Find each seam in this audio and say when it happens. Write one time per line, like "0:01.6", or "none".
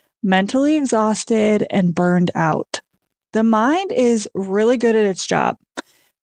0:03.2

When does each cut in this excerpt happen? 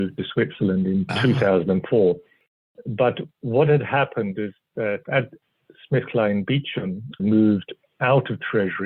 0:07.2

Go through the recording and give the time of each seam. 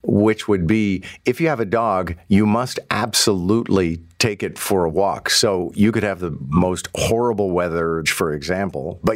0:08.1

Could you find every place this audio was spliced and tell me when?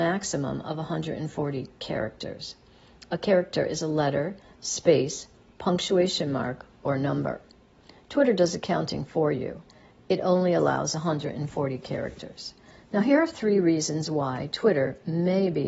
none

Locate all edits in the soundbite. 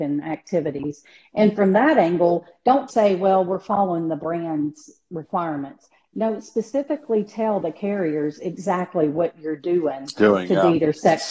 0:02.9

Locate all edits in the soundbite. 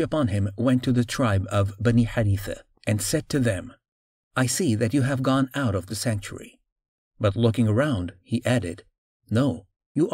none

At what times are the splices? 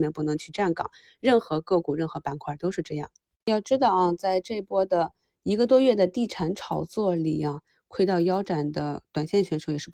none

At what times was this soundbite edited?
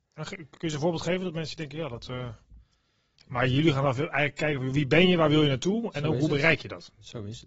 0:03.1

